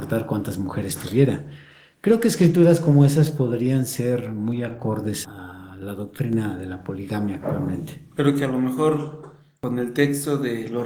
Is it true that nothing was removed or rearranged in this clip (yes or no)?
yes